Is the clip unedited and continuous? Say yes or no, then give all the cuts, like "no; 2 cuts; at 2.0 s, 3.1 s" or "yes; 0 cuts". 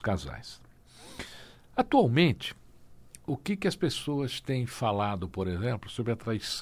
yes; 0 cuts